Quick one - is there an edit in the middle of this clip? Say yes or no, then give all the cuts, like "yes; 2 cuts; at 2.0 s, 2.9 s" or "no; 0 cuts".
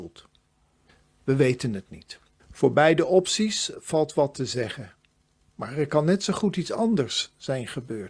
yes; 1 cut; at 2.4 s